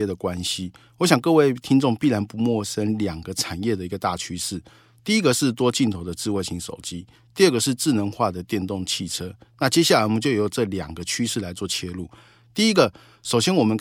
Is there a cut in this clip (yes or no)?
no